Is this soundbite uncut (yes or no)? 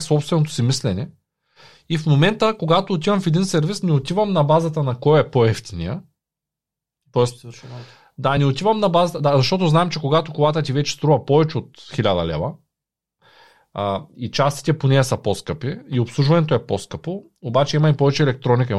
yes